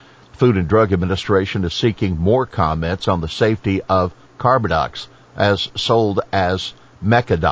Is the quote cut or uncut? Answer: uncut